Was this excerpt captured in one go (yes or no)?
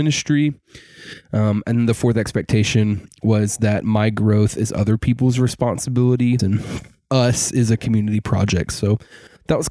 no